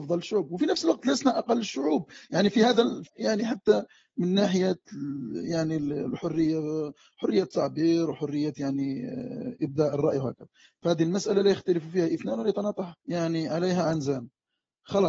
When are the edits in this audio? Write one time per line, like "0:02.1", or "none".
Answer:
0:03.1
0:13.0

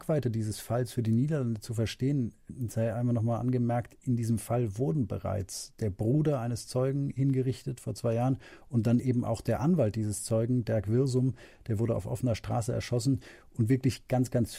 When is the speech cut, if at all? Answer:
none

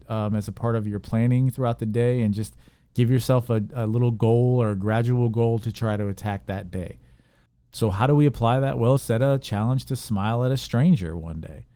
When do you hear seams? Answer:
0:09.0

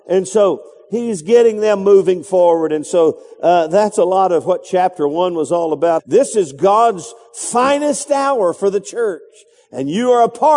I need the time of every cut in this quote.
0:06.0

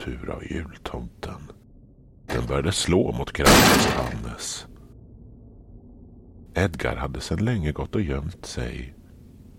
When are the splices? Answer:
0:02.3

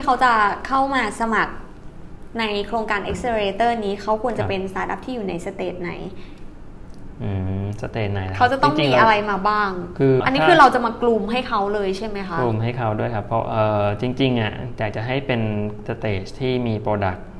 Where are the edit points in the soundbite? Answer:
0:10.2

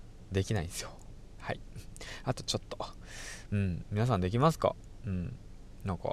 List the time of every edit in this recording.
0:01.4
0:03.8

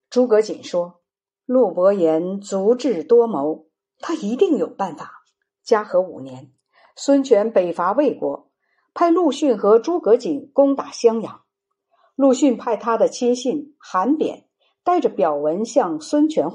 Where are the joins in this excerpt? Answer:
0:05.5

